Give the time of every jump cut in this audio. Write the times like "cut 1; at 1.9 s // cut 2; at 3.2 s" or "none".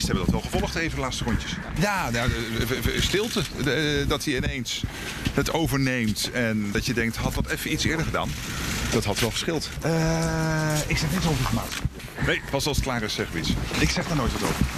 none